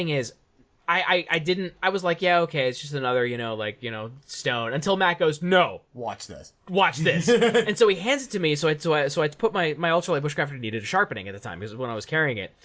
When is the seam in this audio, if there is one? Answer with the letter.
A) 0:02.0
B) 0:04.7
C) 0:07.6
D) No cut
D